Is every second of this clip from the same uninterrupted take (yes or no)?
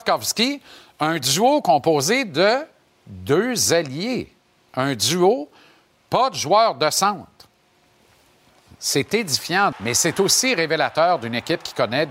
no